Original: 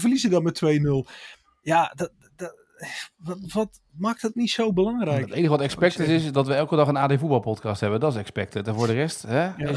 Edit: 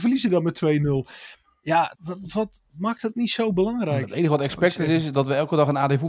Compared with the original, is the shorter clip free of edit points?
no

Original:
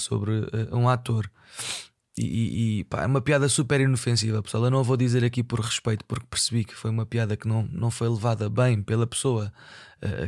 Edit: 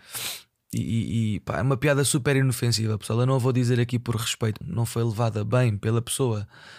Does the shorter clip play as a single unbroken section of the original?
no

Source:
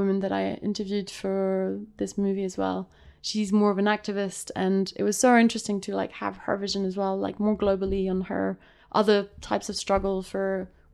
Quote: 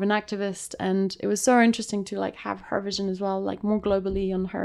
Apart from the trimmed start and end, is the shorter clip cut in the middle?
no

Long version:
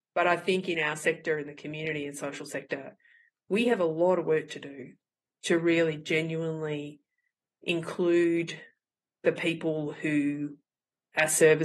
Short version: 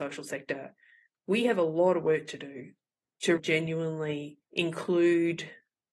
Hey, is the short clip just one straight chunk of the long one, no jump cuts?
no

